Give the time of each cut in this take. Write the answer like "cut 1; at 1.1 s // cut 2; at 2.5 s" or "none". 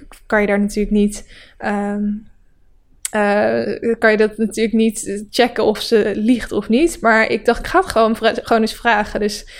none